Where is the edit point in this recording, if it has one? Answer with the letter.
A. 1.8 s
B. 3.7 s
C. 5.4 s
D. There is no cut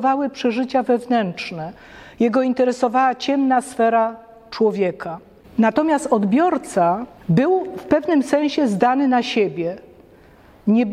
D